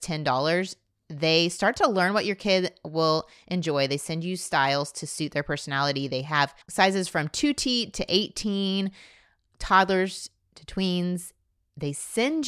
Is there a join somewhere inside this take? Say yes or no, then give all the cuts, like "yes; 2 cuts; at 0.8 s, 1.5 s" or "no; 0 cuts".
yes; 1 cut; at 6.6 s